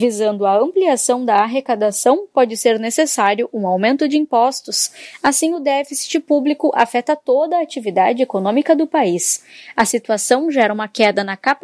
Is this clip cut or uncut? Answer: uncut